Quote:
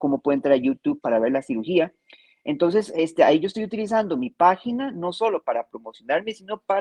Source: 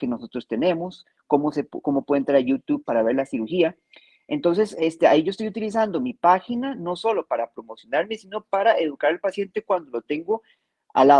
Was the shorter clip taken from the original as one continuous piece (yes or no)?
yes